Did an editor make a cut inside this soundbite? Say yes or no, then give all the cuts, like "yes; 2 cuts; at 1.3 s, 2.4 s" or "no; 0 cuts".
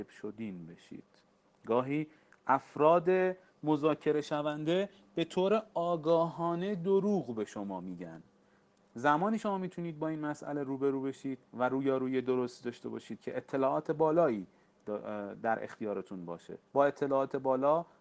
yes; 2 cuts; at 11.5 s, 16.7 s